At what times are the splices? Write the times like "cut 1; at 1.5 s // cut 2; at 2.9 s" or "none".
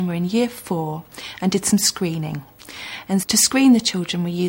cut 1; at 3.2 s

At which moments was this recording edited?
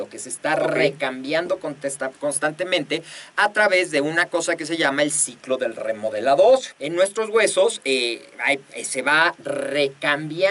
cut 1; at 6.8 s

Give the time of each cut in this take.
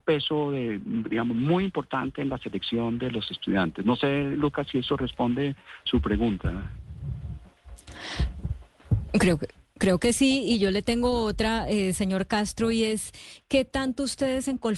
none

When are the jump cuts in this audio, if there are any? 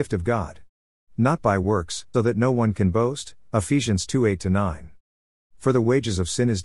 cut 1; at 2.1 s // cut 2; at 5.3 s

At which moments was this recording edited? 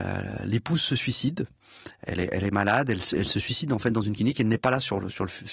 cut 1; at 3.1 s

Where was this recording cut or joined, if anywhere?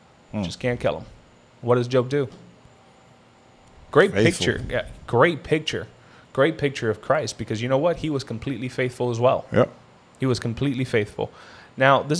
none

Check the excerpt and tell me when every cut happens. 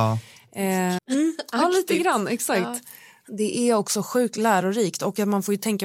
cut 1; at 1.0 s

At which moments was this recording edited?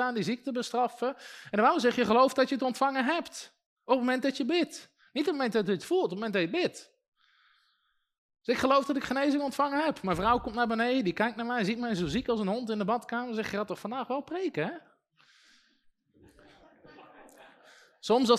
none

